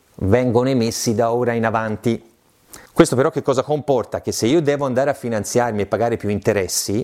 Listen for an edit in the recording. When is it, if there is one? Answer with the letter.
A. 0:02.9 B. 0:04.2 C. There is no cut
C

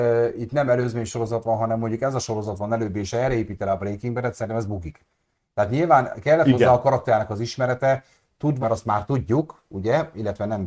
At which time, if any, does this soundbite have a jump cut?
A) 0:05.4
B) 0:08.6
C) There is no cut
B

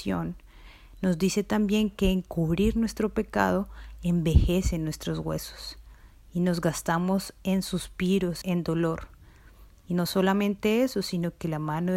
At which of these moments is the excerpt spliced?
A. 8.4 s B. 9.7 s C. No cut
A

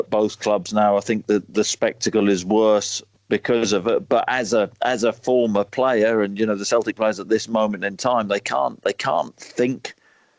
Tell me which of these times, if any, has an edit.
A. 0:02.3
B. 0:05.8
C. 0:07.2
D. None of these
D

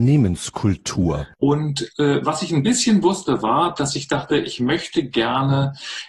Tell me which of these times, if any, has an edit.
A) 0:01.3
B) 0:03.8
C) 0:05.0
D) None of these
A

